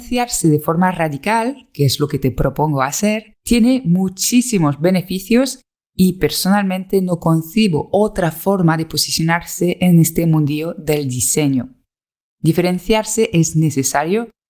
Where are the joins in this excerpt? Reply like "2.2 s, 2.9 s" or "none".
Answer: 3.4 s